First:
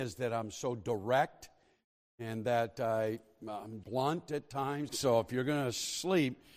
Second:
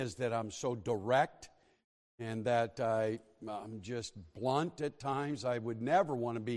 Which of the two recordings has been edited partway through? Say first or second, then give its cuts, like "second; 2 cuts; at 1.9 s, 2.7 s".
first; 2 cuts; at 3.8 s, 4.9 s